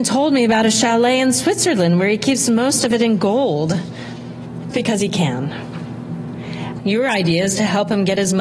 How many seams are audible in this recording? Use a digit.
2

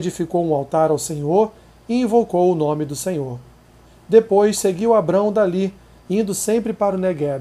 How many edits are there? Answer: 0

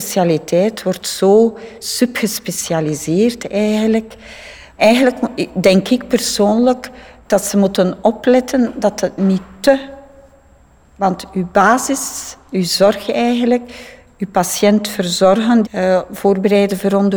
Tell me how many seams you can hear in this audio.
1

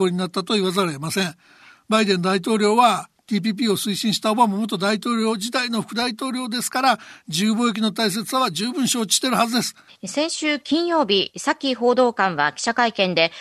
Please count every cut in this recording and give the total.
1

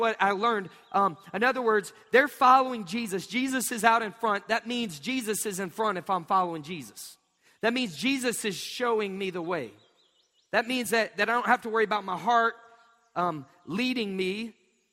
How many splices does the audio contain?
0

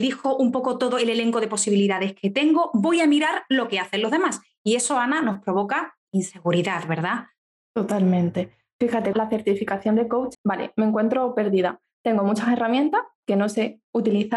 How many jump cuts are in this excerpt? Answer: 2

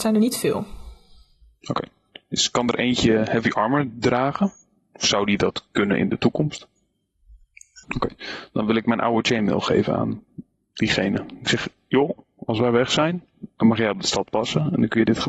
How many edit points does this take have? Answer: 1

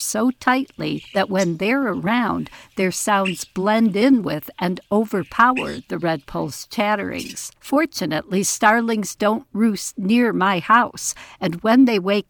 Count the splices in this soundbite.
1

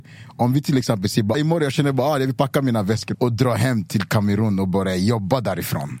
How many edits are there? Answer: 2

